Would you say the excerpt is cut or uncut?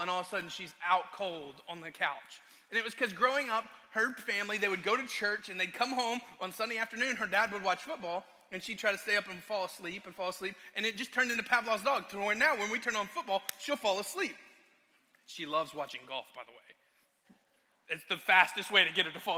uncut